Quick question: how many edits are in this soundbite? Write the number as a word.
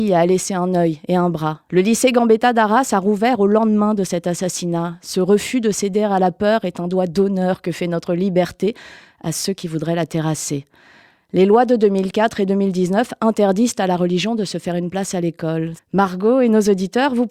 two